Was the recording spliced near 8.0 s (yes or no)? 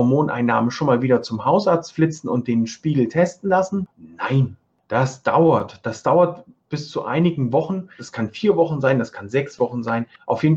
yes